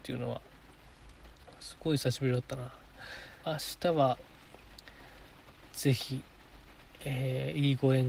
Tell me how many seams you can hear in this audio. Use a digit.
1